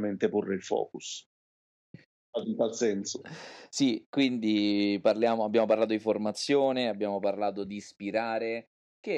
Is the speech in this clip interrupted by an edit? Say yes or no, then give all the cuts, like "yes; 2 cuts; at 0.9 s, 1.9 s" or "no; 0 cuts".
yes; 1 cut; at 2.3 s